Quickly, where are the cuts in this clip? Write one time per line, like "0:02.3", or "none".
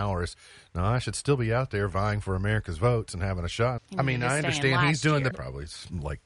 0:03.8
0:05.3